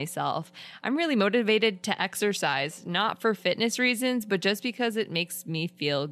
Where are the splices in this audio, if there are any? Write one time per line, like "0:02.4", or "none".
none